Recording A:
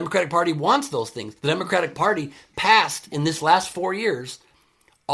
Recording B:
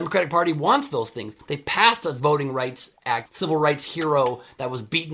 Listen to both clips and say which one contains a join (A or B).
B